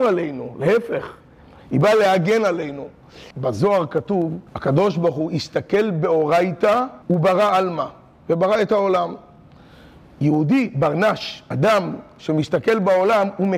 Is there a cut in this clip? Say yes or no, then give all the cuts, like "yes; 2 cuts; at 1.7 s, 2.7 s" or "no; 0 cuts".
yes; 3 cuts; at 3.3 s, 4.5 s, 7.0 s